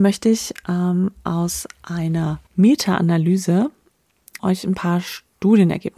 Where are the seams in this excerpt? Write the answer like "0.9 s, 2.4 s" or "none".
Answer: 2.5 s, 4.4 s